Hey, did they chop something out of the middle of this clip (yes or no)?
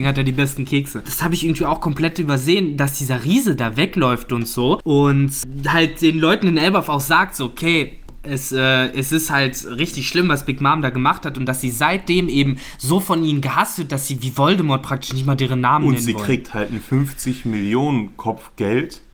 yes